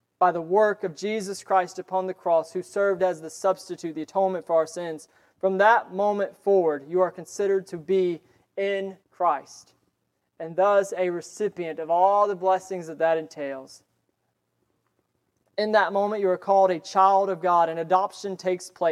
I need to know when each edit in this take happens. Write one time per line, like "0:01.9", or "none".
0:09.0